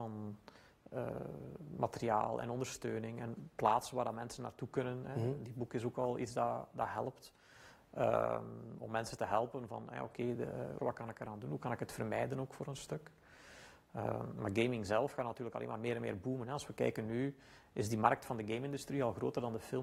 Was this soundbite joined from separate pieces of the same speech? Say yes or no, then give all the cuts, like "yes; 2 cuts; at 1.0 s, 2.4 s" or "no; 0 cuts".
yes; 1 cut; at 10.8 s